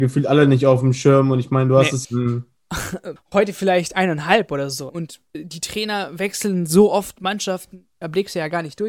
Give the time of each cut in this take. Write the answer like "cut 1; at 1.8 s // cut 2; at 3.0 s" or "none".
cut 1; at 2.0 s // cut 2; at 3.2 s // cut 3; at 4.9 s